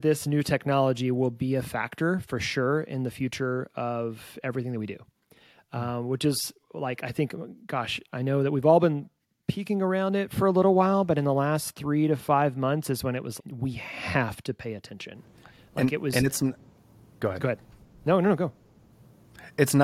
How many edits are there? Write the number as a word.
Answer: one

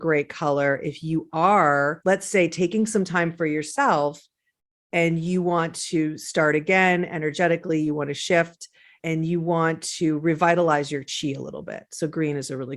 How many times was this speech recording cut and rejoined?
zero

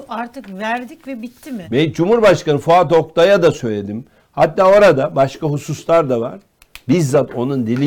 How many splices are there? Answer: one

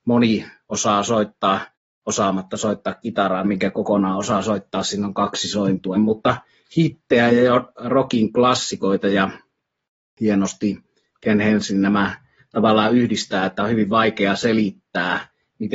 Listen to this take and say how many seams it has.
two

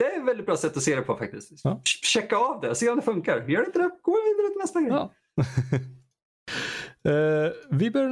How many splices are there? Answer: zero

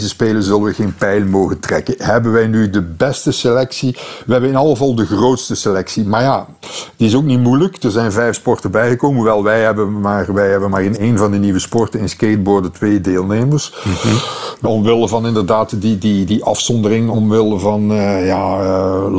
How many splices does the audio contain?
two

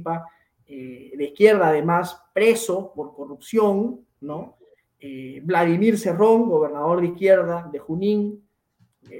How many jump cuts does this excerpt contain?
zero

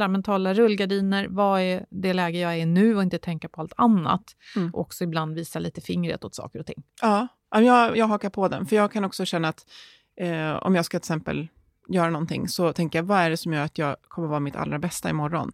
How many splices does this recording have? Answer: zero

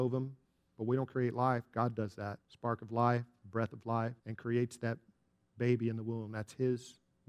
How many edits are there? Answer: two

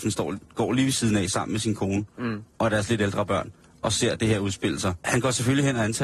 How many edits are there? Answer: one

